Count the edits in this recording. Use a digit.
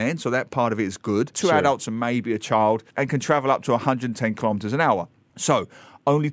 2